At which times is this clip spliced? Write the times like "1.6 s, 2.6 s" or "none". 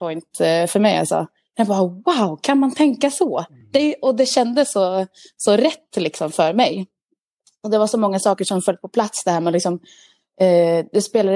none